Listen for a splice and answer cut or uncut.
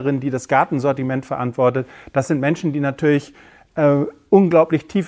uncut